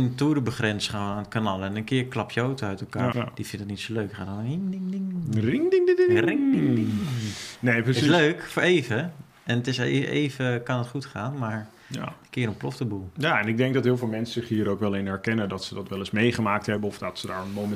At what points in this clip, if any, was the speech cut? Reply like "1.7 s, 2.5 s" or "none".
3.1 s